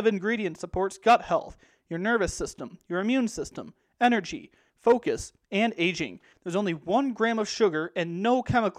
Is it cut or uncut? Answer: cut